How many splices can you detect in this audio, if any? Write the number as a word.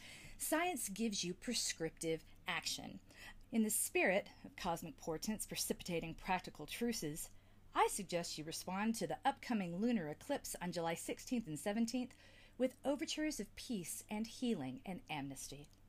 one